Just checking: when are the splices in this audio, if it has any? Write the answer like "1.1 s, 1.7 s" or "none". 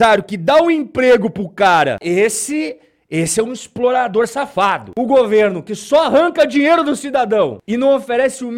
2.0 s